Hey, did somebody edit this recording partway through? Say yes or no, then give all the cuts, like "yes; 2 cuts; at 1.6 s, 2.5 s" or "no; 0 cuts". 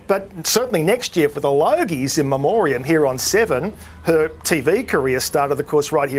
no; 0 cuts